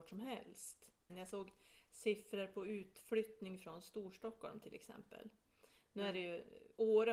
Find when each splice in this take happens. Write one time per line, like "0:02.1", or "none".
0:01.1